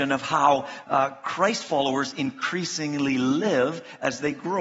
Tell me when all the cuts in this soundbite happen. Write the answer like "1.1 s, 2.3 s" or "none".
none